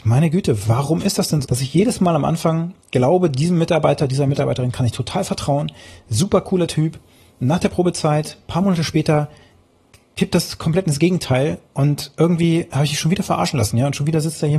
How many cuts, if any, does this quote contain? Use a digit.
1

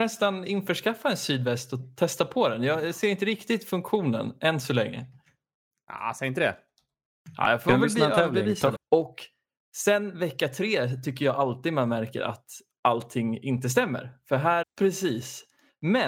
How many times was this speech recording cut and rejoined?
2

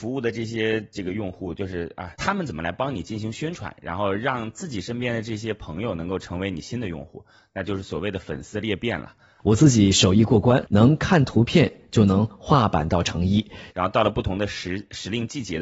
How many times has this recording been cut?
3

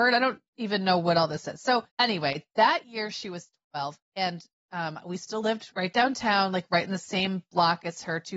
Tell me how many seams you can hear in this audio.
1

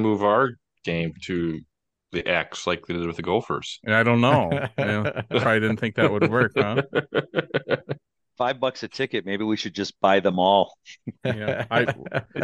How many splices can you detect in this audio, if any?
0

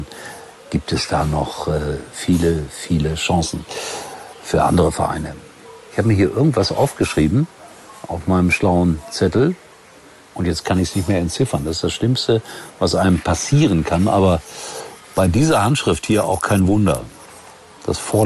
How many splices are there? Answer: 0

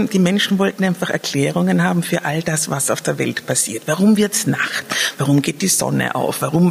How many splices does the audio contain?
0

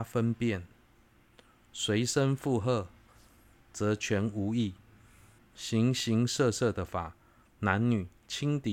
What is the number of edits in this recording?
1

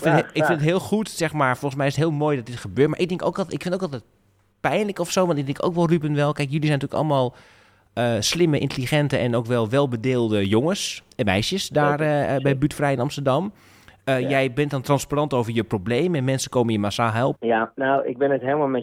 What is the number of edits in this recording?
1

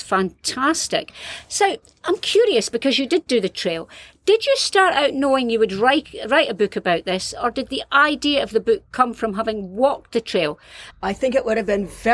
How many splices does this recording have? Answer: 1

